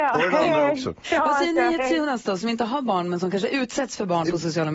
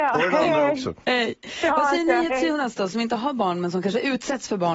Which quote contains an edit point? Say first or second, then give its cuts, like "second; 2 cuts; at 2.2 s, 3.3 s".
first; 1 cut; at 1.0 s